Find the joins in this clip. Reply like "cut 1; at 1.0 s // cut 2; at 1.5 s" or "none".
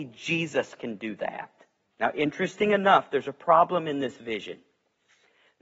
cut 1; at 1.9 s